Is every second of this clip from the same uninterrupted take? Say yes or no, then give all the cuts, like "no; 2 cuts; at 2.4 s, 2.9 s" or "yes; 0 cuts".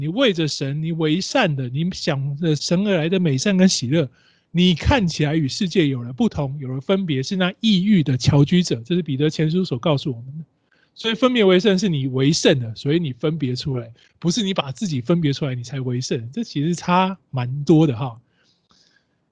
no; 1 cut; at 2.6 s